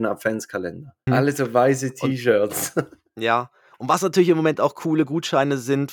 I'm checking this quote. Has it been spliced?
yes; 1 cut; at 1.1 s

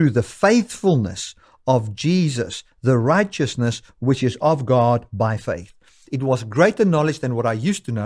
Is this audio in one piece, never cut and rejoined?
no; 1 cut; at 6.0 s

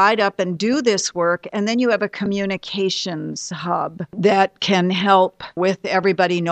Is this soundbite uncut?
yes; 0 cuts

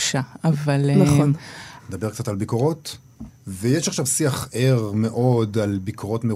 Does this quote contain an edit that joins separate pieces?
yes; 2 cuts; at 1.8 s, 3.3 s

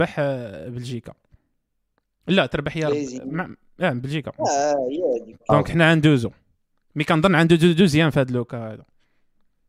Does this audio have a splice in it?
yes; 1 cut; at 5.5 s

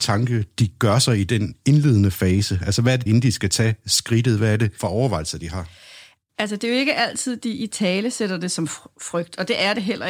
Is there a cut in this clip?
yes; 1 cut; at 3.1 s

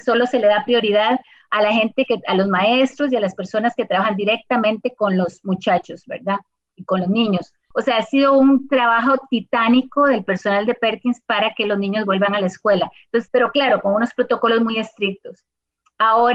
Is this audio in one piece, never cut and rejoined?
no; 2 cuts; at 7.7 s, 13.3 s

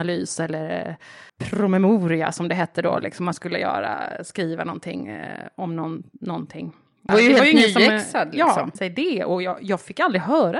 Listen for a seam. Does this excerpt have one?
yes; 3 cuts; at 1.3 s, 7.1 s, 8.8 s

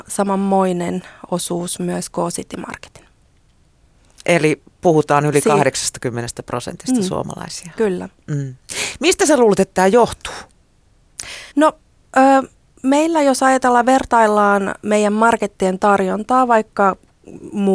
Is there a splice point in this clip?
yes; 1 cut; at 11.5 s

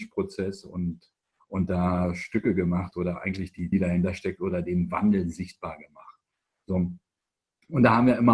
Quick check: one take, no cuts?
no; 1 cut; at 3.7 s

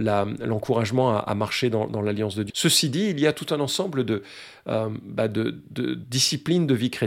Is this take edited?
yes; 1 cut; at 2.5 s

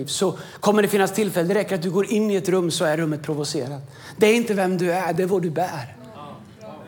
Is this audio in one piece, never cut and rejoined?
yes; 0 cuts

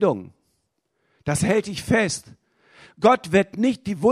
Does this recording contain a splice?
no; 0 cuts

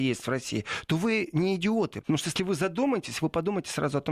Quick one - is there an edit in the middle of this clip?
yes; 1 cut; at 2.0 s

